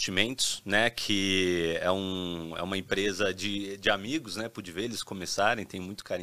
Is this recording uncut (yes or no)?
yes